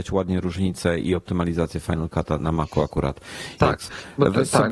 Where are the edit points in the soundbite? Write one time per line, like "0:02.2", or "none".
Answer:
0:02.4
0:03.6